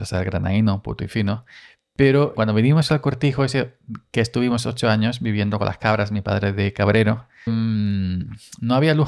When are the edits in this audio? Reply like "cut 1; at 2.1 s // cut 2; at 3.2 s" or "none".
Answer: cut 1; at 2.4 s // cut 2; at 7.5 s